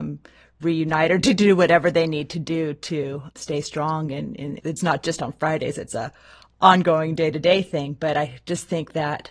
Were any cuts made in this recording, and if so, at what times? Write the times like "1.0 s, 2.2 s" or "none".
4.6 s